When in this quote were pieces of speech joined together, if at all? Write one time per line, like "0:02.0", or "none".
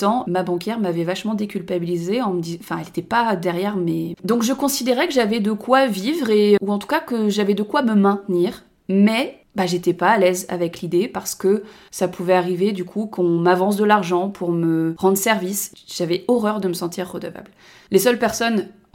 0:04.1
0:06.6